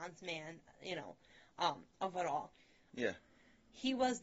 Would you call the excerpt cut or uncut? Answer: cut